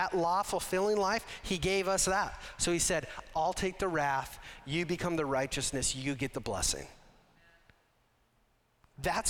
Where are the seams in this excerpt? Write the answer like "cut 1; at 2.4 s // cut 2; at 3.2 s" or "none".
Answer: cut 1; at 3.3 s